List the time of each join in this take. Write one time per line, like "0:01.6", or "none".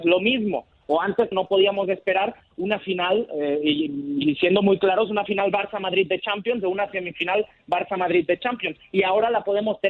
0:01.3